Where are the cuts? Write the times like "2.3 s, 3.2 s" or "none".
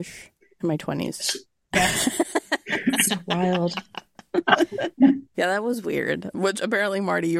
1.6 s